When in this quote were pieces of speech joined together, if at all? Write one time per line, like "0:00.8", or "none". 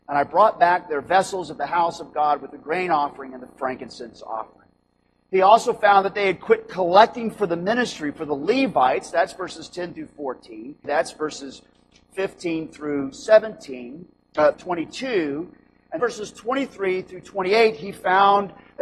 0:10.8
0:14.5
0:16.0